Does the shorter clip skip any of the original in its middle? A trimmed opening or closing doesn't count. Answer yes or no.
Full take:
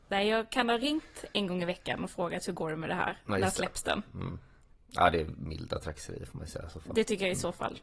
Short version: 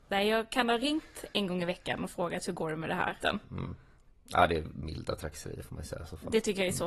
yes